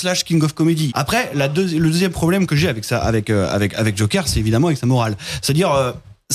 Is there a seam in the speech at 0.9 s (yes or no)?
yes